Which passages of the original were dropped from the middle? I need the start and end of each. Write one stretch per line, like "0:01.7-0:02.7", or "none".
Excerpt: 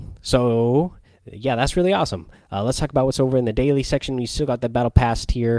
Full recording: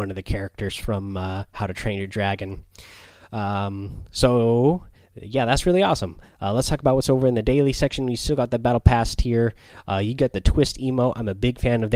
none